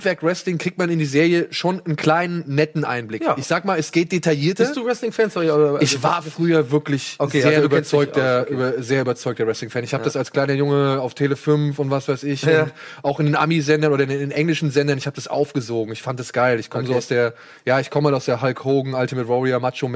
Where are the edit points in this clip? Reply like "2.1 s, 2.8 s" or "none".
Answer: none